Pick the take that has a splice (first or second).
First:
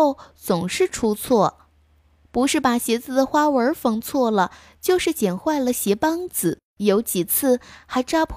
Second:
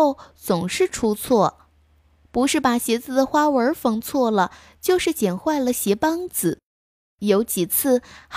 first